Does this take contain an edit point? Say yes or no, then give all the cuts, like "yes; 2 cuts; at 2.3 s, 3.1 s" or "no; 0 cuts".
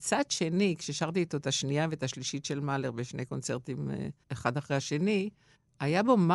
no; 0 cuts